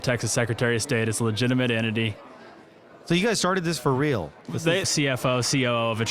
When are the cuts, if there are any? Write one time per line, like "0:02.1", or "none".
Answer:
0:04.8